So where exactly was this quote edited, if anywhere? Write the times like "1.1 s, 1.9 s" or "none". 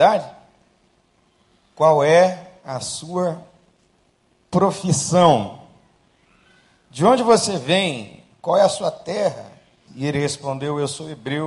9.9 s